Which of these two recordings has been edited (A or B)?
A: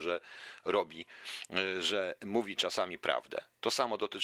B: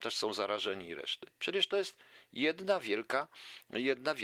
B